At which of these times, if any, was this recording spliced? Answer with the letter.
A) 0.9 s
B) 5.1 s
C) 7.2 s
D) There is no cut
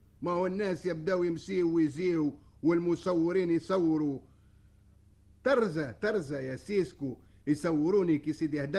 D